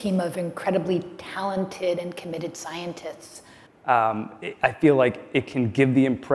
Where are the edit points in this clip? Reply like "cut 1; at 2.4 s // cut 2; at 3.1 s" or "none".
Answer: cut 1; at 3.7 s